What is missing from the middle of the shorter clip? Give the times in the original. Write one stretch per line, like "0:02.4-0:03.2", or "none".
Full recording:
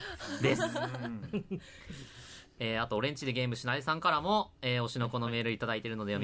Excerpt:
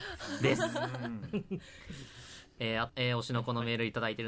0:02.9-0:04.5